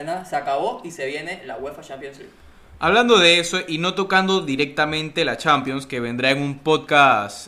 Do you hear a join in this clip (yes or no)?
no